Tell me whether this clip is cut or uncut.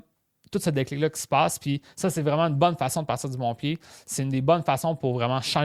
uncut